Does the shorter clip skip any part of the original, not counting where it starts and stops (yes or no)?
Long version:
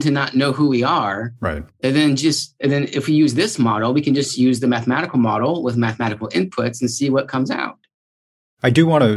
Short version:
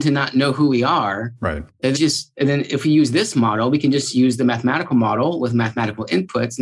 yes